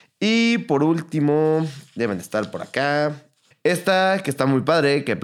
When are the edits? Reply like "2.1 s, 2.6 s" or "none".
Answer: 3.5 s